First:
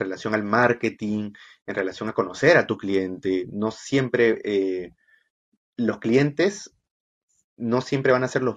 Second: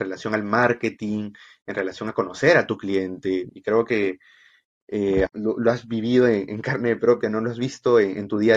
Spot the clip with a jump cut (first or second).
second